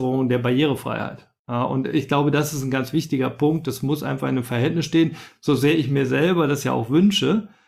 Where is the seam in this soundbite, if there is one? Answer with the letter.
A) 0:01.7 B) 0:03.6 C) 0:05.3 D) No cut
D